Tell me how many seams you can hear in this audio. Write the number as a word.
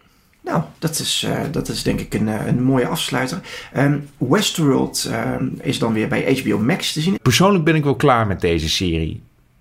two